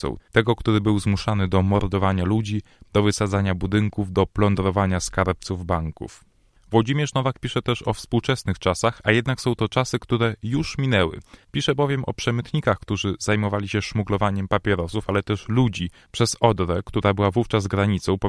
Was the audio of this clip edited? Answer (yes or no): no